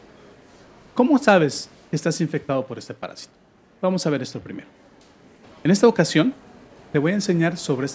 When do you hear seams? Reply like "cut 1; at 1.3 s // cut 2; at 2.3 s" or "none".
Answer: cut 1; at 5.4 s